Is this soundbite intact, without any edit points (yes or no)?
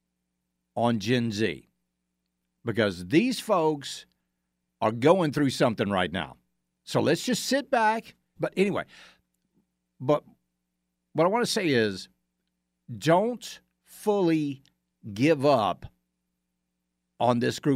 no